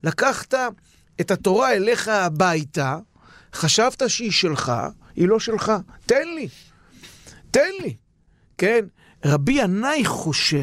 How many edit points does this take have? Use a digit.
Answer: 0